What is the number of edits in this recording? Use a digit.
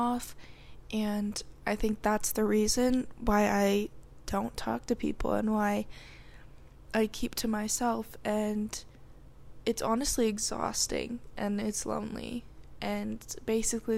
0